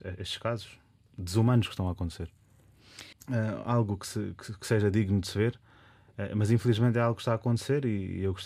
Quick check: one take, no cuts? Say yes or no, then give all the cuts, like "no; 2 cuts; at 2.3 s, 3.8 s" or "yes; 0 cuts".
no; 1 cut; at 3.1 s